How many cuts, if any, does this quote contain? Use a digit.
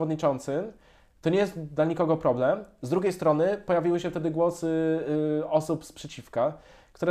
0